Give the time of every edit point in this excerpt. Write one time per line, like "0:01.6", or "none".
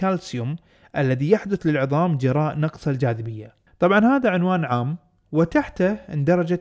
0:03.7